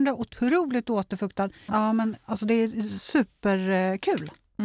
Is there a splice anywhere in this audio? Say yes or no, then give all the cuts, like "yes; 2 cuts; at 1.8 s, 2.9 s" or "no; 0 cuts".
yes; 1 cut; at 1.7 s